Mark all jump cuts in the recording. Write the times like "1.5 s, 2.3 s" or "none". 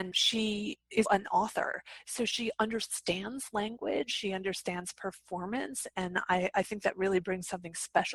1.0 s